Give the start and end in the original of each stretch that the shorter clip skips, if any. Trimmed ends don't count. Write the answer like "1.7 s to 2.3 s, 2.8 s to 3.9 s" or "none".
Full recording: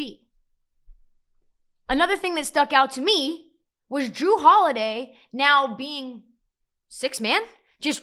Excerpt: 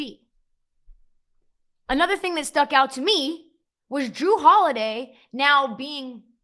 none

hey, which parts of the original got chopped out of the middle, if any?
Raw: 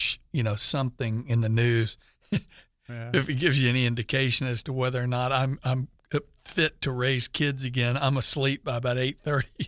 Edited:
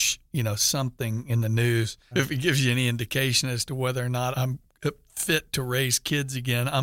2.1 s to 3.1 s, 5.3 s to 5.6 s

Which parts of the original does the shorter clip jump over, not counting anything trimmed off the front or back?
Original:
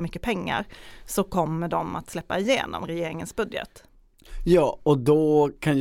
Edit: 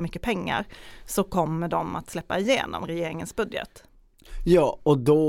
none

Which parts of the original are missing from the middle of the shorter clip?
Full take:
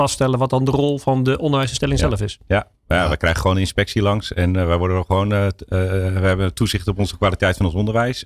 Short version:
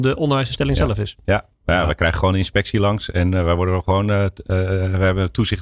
none

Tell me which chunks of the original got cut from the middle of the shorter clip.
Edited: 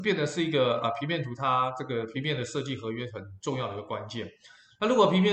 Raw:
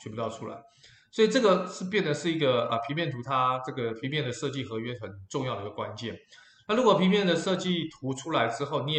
none

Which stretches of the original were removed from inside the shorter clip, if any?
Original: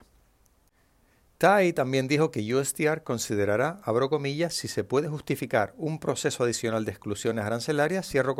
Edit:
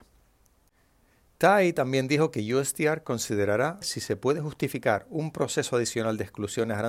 3.8 s to 4.5 s

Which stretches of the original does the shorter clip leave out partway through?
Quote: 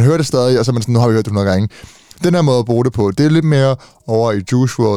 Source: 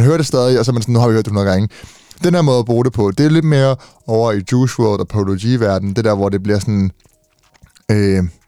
none

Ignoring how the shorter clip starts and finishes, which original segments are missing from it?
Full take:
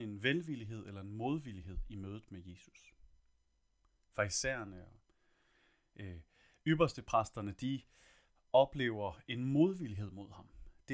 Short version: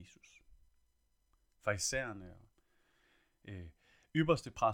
none

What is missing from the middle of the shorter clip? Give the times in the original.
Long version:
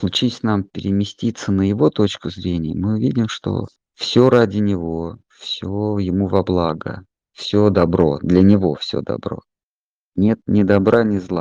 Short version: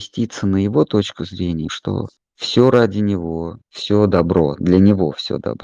2.7 s to 3.3 s, 5.2 s to 7.2 s

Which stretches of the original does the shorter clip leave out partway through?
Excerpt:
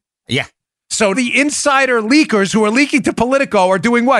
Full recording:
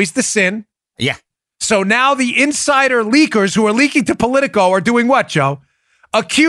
1.8 s to 2.2 s

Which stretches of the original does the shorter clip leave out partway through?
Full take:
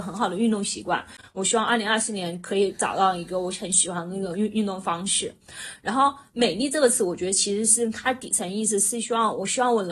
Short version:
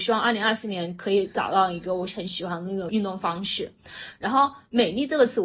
4.3 s to 4.5 s

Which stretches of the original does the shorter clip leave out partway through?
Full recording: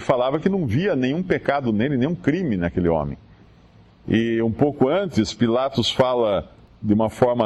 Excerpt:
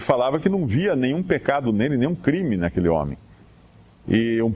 none

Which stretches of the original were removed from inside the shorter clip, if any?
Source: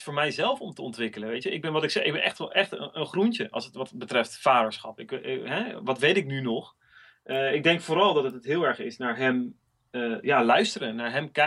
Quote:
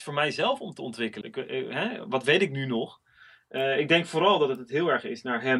1.2 s to 5.0 s

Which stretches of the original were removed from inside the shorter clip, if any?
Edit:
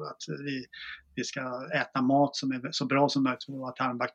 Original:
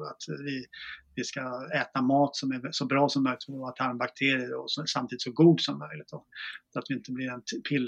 none

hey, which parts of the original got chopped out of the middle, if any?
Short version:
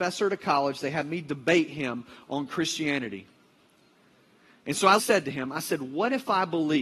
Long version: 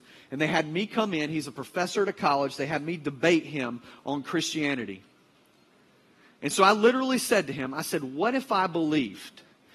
6.7 s to 7.2 s

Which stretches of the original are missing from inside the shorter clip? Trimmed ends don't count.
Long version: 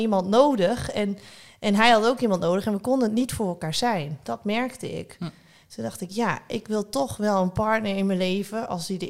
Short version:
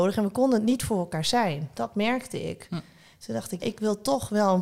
6.1 s to 6.5 s

